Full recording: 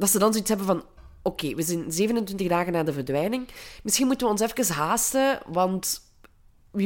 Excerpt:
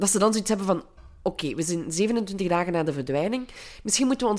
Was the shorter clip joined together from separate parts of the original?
no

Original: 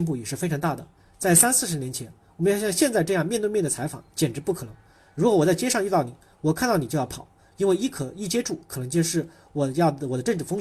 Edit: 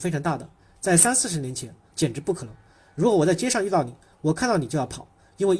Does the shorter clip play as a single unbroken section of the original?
no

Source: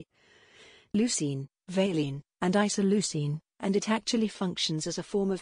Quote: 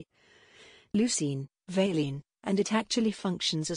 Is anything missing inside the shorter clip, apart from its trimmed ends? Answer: yes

